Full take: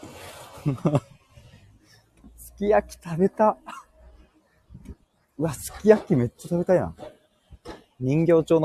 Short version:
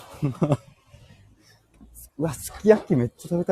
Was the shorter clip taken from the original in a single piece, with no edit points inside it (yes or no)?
no